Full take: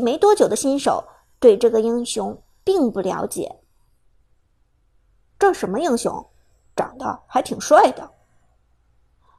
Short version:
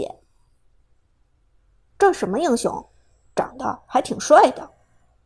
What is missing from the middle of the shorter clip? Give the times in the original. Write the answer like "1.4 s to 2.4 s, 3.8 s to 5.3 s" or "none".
none